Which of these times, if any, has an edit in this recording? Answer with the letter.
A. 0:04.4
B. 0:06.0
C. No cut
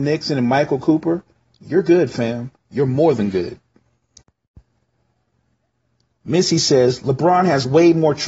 C